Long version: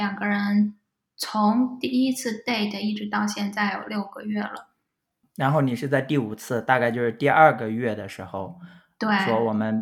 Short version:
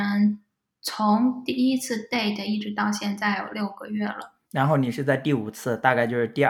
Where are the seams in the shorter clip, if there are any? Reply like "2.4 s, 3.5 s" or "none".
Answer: 4.4 s